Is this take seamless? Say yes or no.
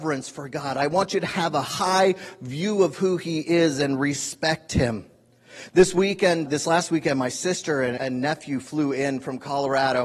no